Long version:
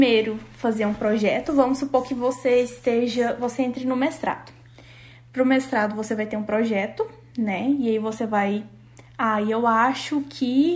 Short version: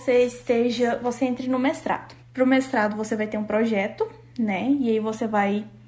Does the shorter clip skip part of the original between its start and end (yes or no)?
yes